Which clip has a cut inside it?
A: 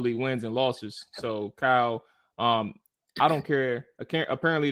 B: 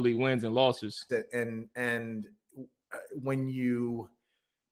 B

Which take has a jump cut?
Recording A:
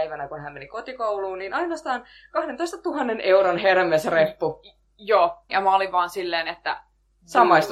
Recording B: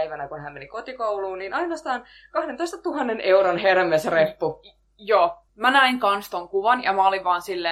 A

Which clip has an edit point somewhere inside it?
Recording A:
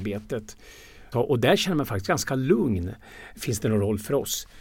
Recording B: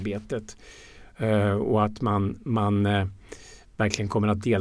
A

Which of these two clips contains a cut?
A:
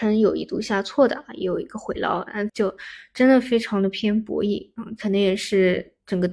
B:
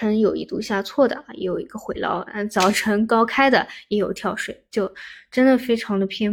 A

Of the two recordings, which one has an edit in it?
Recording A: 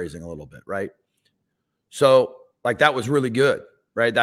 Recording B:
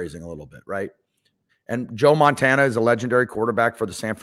B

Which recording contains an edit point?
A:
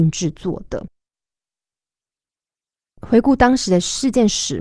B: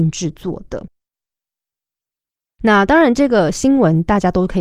B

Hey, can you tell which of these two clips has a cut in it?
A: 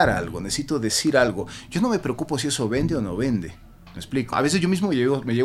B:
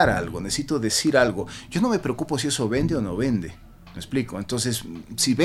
A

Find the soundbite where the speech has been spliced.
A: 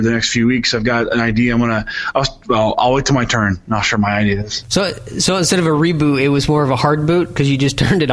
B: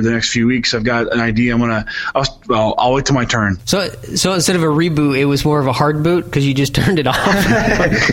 B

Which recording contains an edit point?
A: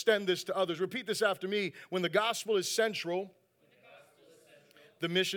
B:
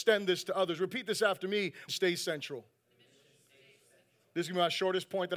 B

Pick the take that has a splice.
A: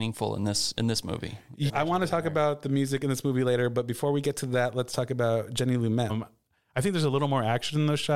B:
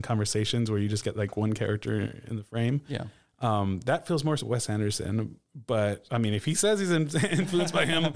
A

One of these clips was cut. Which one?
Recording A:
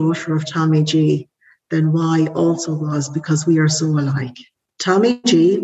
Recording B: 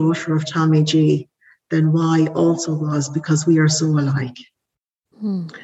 A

